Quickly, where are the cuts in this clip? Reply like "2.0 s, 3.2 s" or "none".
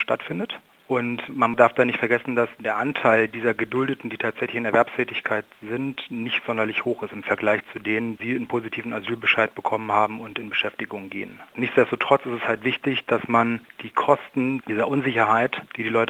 none